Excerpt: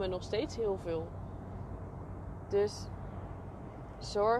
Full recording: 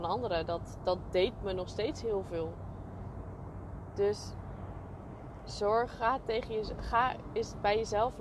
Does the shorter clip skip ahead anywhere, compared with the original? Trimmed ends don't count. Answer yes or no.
no